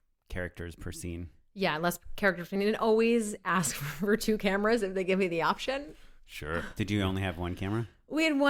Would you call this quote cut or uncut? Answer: uncut